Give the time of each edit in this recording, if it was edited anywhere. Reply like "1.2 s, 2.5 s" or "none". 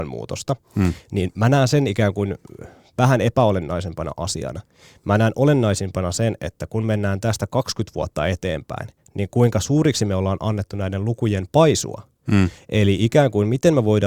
none